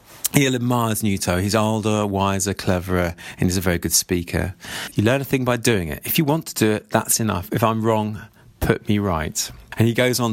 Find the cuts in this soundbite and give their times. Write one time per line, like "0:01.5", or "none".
0:04.9

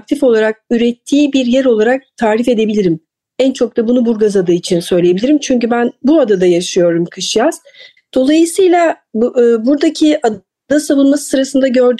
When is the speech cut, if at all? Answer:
0:08.0

